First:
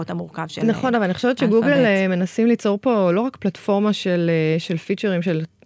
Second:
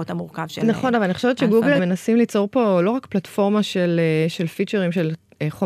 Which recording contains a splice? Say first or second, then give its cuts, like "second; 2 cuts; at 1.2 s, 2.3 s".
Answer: second; 1 cut; at 1.8 s